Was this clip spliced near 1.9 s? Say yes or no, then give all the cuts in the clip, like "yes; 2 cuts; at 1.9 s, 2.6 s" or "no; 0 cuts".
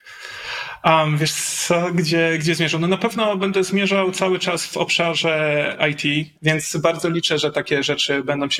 no; 1 cut; at 6.4 s